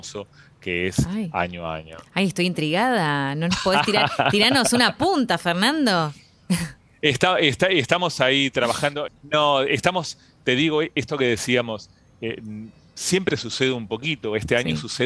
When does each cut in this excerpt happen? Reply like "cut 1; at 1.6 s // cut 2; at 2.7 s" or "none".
cut 1; at 9.1 s